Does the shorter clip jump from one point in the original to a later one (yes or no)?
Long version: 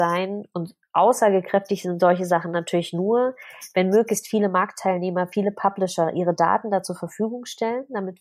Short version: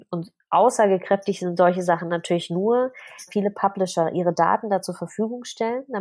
yes